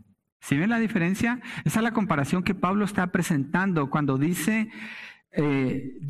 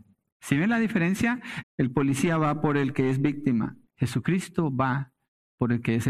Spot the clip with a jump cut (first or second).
second